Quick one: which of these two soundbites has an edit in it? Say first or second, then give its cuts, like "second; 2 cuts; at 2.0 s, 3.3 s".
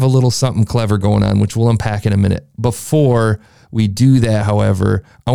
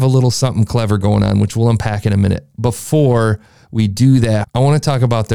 second; 1 cut; at 4.4 s